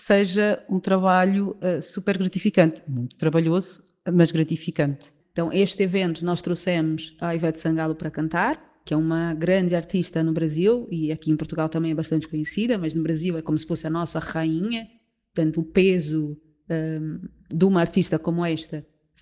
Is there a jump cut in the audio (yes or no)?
yes